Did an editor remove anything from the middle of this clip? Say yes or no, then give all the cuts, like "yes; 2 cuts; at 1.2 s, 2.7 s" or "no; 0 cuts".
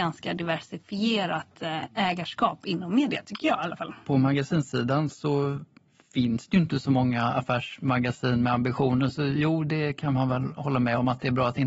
no; 0 cuts